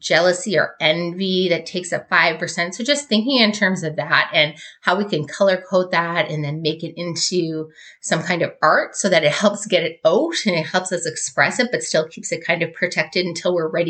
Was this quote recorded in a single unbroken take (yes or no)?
yes